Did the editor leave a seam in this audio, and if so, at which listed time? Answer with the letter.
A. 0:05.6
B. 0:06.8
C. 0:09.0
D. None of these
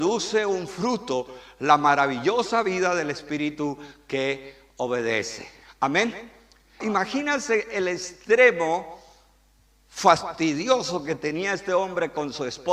B